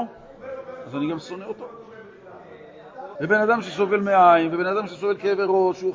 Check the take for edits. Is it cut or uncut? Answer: cut